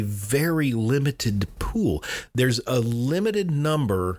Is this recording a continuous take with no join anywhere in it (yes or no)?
yes